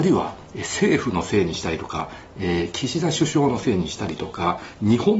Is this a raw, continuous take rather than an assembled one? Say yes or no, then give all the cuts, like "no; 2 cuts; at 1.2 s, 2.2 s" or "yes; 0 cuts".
yes; 0 cuts